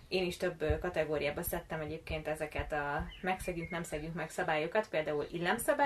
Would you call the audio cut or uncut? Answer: uncut